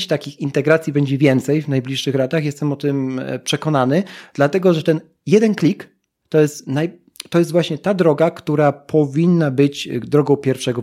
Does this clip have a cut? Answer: no; 0 cuts

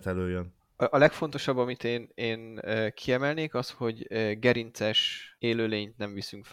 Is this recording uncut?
yes; 0 cuts

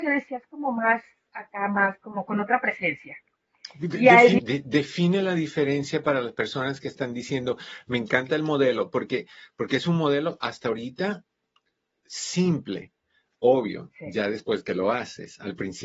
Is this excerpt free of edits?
no; 1 cut; at 4.4 s

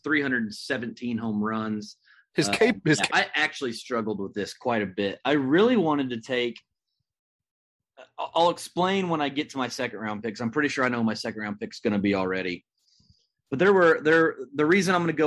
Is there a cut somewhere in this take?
yes; 1 cut; at 3.1 s

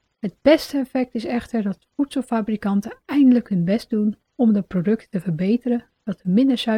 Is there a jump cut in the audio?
no; 0 cuts

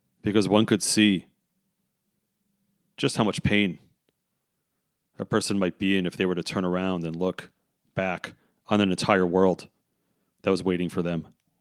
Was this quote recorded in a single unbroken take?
yes; 0 cuts

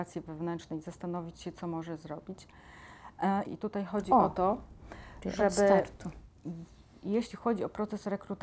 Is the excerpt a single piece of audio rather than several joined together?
no; 1 cut; at 3.5 s

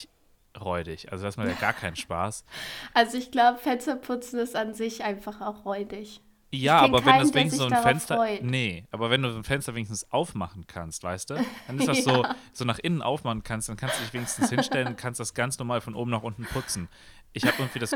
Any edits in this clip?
no; 0 cuts

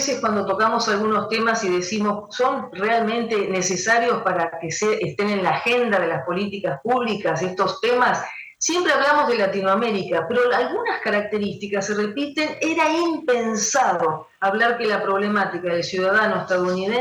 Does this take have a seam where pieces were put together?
no; 0 cuts

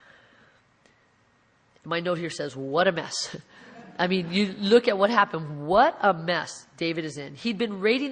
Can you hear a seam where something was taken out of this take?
no; 0 cuts

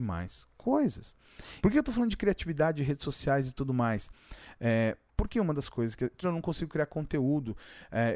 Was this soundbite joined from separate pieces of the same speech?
yes; 2 cuts; at 1.6 s, 6.2 s

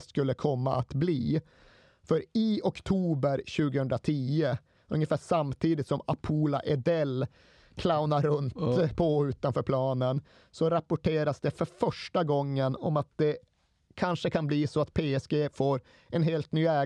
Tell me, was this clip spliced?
no; 0 cuts

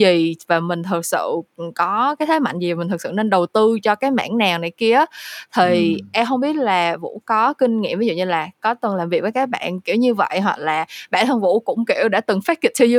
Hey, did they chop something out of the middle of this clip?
no; 0 cuts

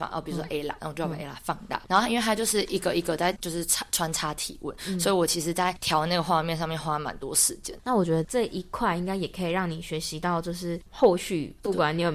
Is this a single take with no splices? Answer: yes; 0 cuts

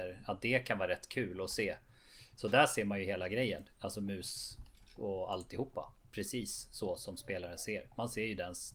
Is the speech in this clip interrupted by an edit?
no; 0 cuts

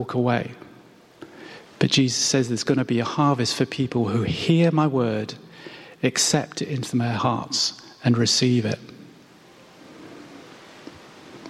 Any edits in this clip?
no; 0 cuts

